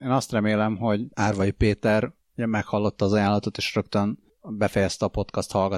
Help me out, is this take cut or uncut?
cut